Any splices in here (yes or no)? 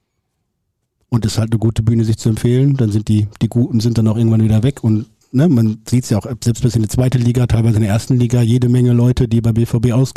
no